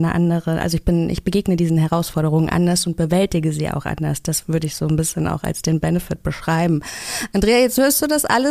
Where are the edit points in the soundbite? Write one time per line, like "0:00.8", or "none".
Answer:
none